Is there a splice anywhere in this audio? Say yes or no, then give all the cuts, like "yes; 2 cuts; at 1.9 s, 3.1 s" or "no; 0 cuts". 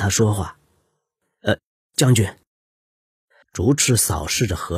yes; 1 cut; at 3.4 s